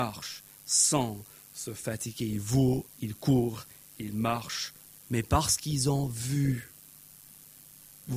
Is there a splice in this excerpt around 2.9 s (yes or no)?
yes